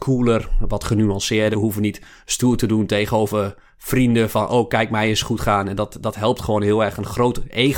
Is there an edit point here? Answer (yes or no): yes